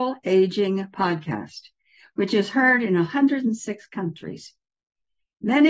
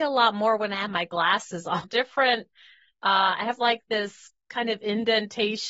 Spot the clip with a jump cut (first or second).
second